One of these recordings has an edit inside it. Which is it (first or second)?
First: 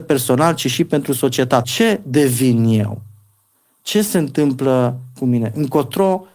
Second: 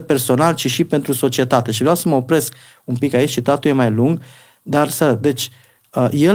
first